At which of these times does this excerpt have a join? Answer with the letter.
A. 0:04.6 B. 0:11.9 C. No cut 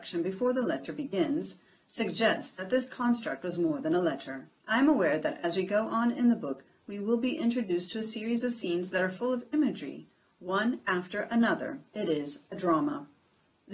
A